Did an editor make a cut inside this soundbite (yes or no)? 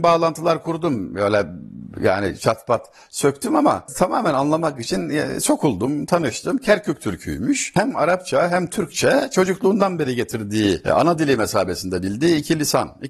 no